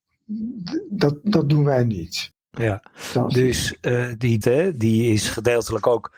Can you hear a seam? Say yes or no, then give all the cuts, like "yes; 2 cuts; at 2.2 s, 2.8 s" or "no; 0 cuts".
yes; 2 cuts; at 2.3 s, 4.4 s